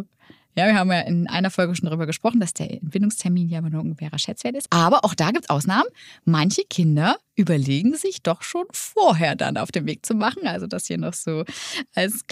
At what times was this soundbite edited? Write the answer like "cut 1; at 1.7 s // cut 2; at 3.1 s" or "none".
cut 1; at 4.7 s